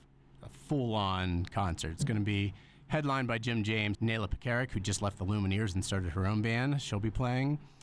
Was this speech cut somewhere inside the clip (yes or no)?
yes